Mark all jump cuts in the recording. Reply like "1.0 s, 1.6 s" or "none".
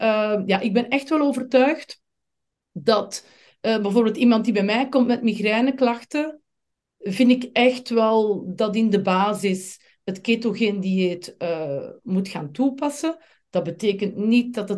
none